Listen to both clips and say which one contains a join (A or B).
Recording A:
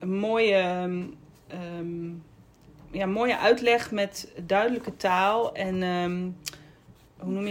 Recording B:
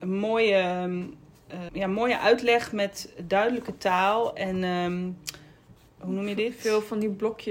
B